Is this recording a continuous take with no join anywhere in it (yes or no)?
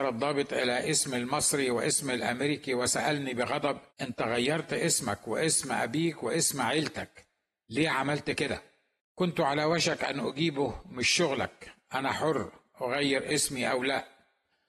no